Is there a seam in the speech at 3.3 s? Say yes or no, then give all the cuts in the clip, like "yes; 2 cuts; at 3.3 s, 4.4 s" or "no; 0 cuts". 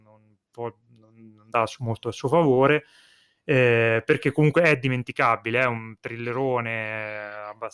no; 0 cuts